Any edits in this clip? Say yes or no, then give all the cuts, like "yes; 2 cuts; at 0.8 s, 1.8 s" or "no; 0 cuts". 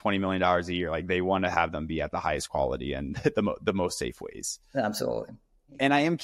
no; 0 cuts